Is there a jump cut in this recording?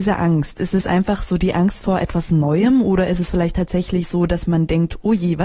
no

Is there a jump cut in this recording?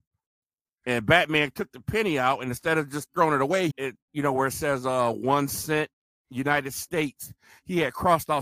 yes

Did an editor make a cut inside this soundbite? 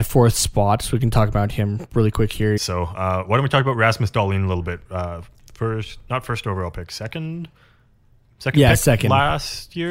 yes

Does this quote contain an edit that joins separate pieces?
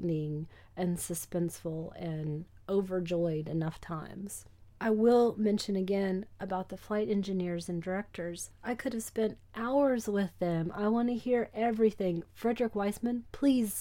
no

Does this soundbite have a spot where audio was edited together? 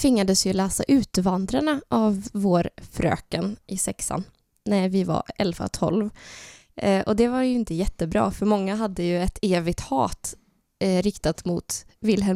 no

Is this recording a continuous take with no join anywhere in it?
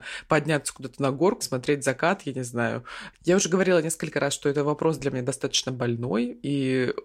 no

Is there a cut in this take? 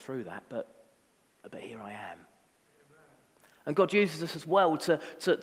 no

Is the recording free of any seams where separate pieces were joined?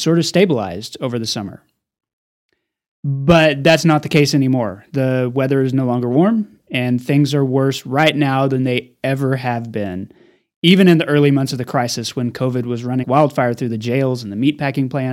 no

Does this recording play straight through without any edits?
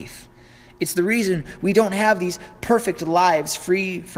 yes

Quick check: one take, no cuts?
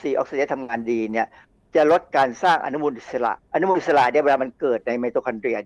no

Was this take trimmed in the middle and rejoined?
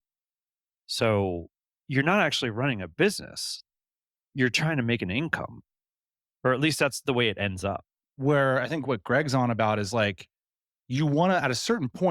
no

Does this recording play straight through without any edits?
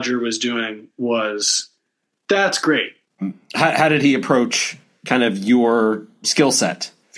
no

